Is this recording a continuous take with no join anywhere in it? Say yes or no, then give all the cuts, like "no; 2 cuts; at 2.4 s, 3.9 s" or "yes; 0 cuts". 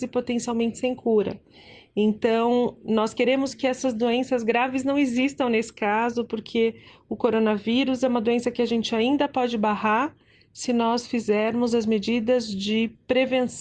yes; 0 cuts